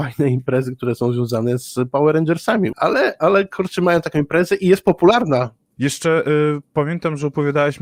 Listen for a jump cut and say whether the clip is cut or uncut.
cut